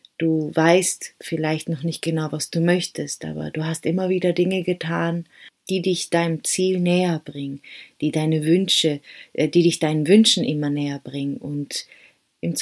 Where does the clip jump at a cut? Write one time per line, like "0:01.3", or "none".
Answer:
none